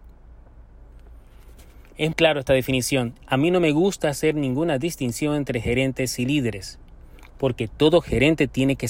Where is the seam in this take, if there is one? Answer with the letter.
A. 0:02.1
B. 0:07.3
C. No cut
A